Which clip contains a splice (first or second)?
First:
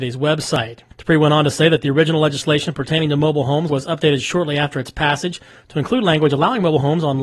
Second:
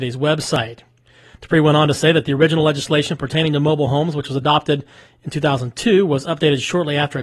first